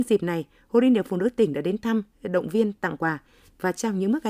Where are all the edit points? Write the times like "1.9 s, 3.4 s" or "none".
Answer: none